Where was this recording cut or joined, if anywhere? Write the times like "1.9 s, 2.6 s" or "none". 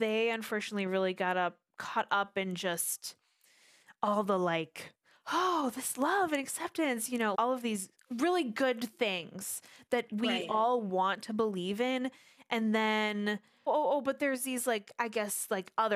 7.3 s, 13.7 s